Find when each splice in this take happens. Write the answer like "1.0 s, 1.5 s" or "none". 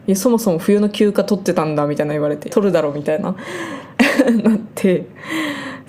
2.5 s